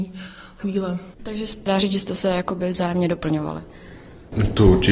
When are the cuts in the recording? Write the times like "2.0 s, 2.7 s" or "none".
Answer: 1.1 s

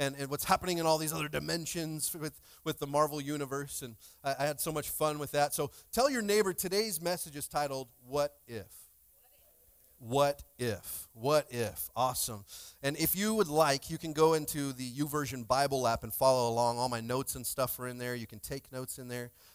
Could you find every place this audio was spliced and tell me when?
none

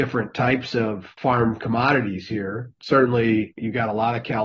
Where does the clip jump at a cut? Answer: 2.8 s

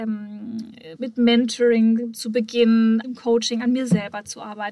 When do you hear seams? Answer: 1.0 s, 3.0 s

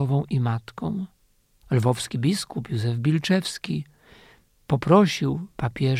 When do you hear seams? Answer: 1.6 s

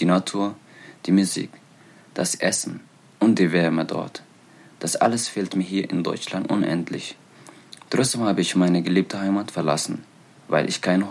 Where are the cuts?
none

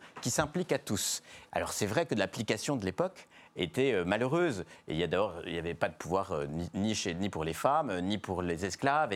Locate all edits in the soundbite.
1.5 s

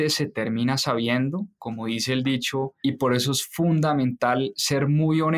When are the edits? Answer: 2.8 s

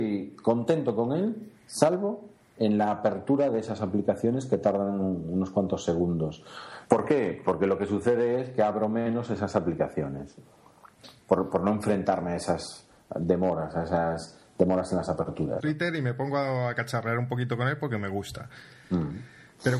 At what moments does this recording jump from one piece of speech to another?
6.9 s, 15.6 s

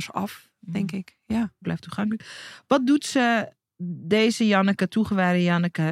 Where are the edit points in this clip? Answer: 1.6 s

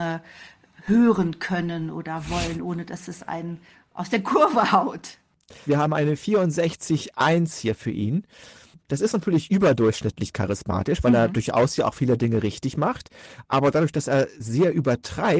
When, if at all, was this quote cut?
5.7 s

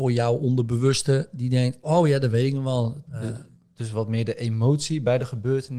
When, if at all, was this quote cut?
1.8 s, 3.1 s

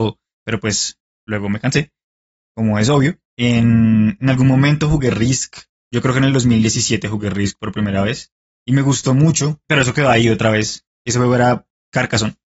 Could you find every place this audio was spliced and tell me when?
3.3 s, 10.9 s

